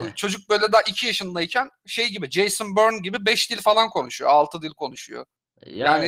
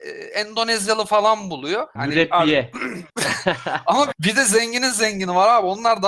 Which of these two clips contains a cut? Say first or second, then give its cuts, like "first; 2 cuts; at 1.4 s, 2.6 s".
second; 3 cuts; at 2.0 s, 3.1 s, 4.1 s